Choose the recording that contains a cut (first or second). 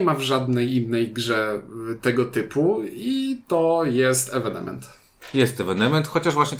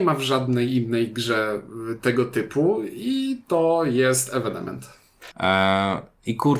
second